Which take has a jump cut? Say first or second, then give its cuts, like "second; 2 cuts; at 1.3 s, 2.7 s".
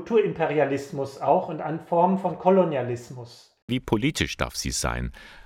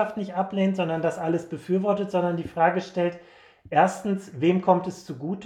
first; 1 cut; at 3.7 s